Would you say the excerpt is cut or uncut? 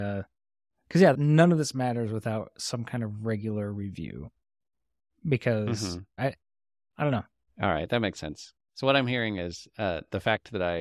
cut